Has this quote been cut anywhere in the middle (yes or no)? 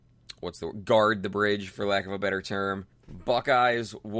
yes